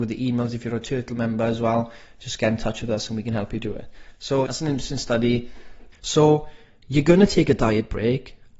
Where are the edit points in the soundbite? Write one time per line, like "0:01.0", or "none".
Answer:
0:04.5
0:05.9